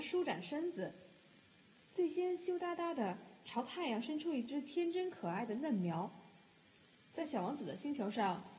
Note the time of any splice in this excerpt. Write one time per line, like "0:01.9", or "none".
0:07.1